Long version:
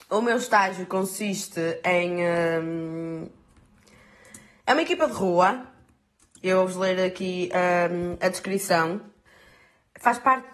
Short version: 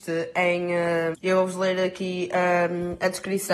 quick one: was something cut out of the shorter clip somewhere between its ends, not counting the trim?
yes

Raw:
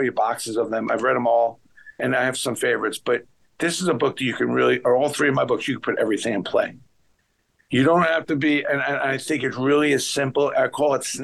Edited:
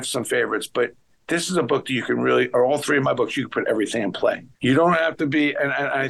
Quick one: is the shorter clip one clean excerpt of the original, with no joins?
no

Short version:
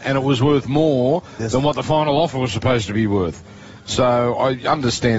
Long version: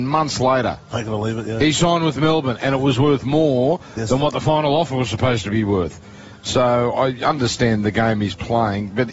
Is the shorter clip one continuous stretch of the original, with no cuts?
yes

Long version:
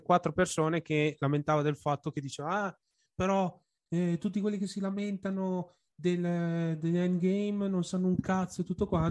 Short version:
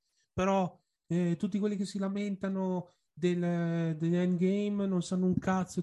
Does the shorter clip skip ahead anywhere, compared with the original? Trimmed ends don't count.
no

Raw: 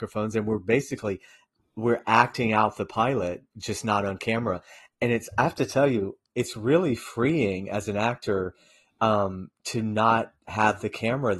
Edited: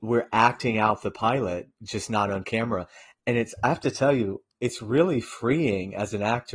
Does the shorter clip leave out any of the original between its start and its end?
no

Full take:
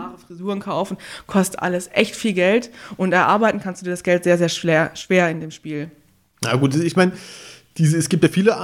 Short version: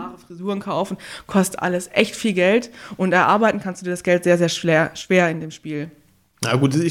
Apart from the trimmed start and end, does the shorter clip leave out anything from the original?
no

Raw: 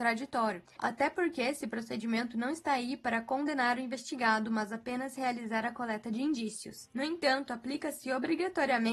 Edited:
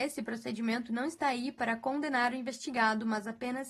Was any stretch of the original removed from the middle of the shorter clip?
no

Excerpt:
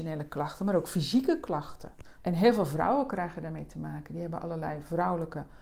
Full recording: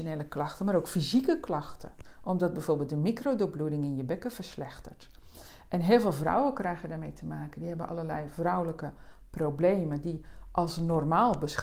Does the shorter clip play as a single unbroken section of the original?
no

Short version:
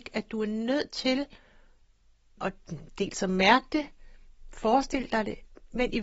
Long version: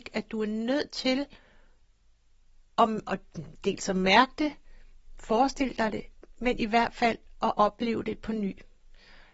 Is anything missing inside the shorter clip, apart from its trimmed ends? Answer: yes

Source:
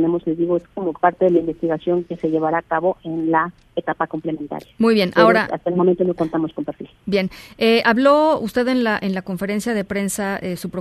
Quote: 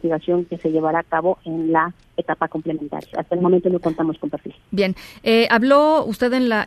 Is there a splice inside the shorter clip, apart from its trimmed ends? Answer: yes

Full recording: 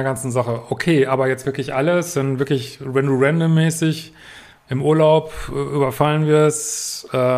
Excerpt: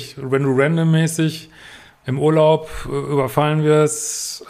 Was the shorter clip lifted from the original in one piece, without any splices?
yes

